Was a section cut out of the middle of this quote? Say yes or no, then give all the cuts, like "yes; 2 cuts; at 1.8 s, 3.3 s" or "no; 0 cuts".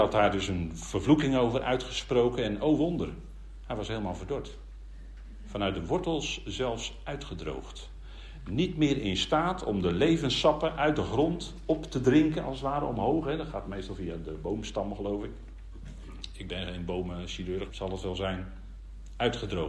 yes; 1 cut; at 17.7 s